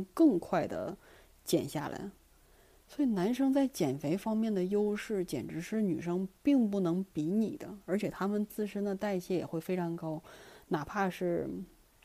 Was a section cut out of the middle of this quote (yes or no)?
no